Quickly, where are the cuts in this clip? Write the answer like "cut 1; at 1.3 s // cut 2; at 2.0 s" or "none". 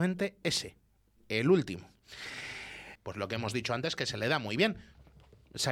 cut 1; at 3.0 s